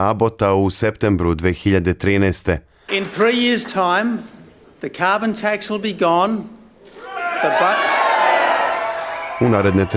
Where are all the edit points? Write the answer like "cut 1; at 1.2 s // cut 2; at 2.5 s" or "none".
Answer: cut 1; at 2.9 s

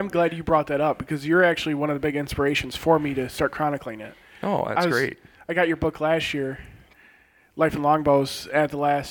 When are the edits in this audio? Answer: none

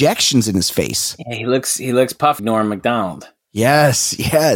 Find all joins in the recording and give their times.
cut 1; at 2.4 s

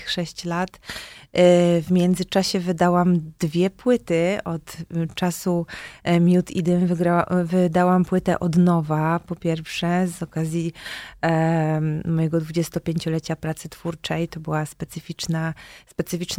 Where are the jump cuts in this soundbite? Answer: none

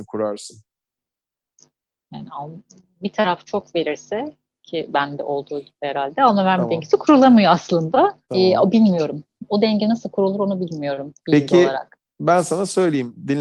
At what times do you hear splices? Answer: cut 1; at 8.2 s // cut 2; at 11.2 s

